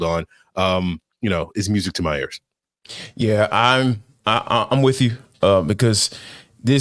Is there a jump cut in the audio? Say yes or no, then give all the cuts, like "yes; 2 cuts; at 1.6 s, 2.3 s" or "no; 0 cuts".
no; 0 cuts